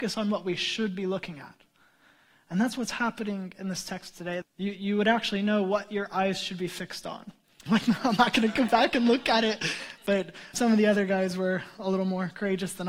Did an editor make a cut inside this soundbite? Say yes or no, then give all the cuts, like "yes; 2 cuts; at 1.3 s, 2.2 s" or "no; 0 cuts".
yes; 3 cuts; at 4.4 s, 7.7 s, 10.5 s